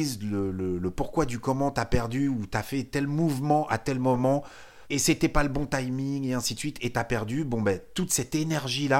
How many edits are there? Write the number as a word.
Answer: one